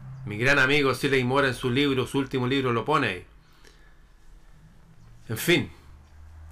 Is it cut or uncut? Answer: uncut